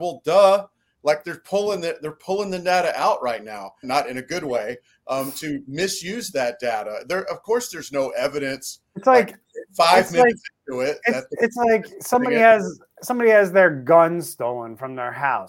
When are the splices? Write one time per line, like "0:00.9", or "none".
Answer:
0:03.8

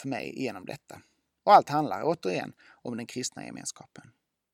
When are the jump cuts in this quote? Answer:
none

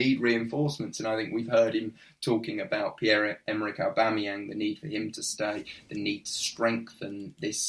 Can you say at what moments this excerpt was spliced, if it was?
none

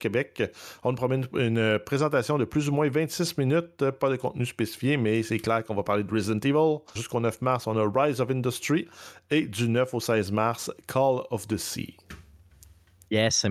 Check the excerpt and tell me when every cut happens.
0:07.0

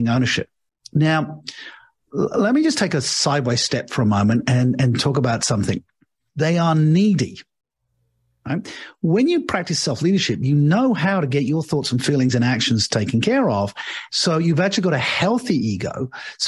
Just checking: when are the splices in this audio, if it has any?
0:06.3
0:14.1

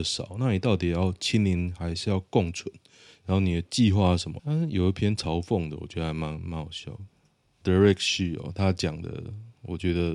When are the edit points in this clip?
0:04.4
0:07.6

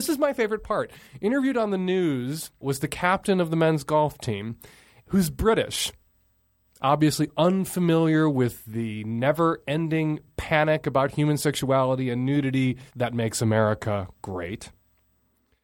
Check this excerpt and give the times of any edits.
0:02.6
0:12.9

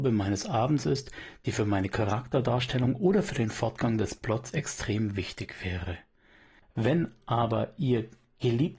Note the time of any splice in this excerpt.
0:06.6

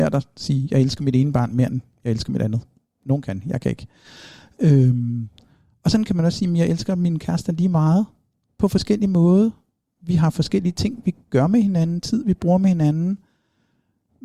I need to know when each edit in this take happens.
none

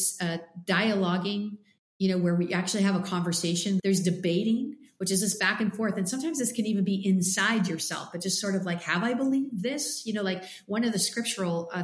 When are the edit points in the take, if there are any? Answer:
0:03.8

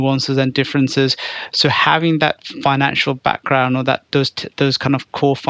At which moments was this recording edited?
none

